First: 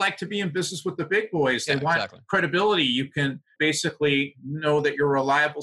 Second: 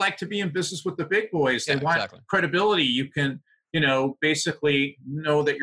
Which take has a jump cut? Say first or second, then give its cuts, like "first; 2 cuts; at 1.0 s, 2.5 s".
first; 1 cut; at 3.6 s